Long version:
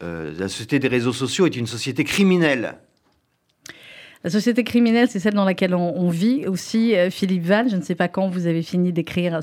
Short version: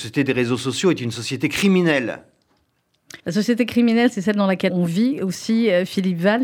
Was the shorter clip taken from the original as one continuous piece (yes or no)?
no